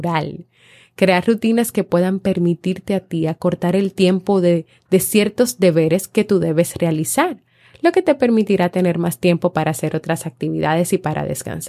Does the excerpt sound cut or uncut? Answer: cut